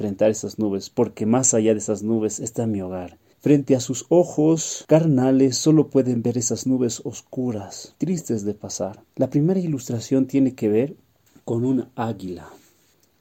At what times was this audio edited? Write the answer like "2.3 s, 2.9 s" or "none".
3.3 s, 9.0 s